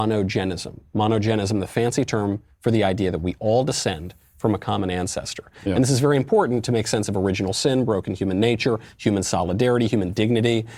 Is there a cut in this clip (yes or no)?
no